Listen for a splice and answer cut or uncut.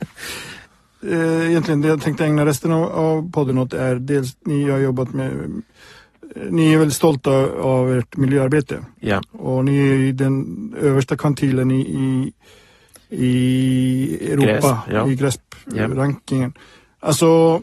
uncut